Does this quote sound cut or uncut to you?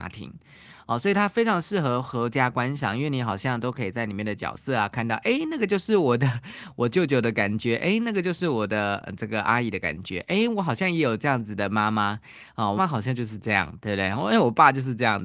cut